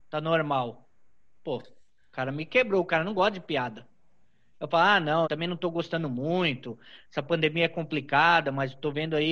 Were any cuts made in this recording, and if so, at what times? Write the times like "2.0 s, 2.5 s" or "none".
5.2 s

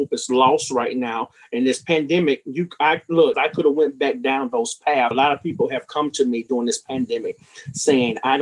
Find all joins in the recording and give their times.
3.3 s, 5.1 s

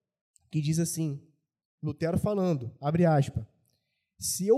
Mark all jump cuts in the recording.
none

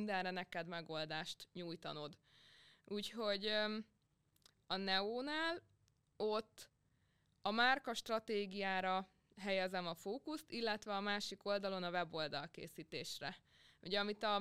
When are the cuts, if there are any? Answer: none

